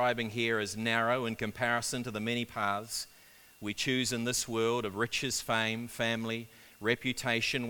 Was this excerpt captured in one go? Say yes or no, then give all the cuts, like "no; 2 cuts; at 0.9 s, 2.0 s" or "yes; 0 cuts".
yes; 0 cuts